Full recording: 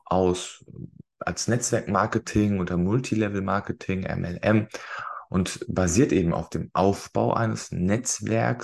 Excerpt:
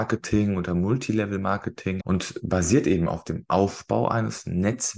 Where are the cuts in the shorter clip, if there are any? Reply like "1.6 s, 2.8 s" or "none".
2.0 s